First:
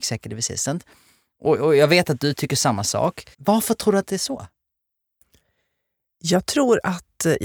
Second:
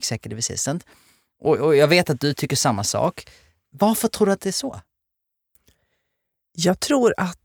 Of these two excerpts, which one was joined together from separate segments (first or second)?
first